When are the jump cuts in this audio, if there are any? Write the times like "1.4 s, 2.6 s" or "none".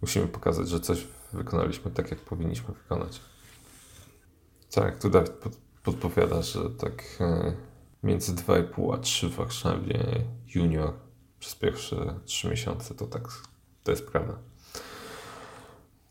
13.0 s